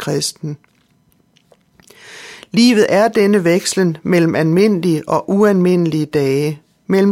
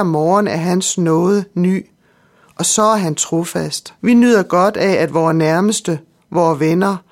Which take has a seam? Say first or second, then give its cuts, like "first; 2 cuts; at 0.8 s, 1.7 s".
second; 1 cut; at 4.0 s